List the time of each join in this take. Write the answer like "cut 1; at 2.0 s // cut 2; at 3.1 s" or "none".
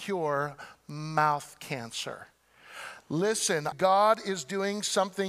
cut 1; at 3.7 s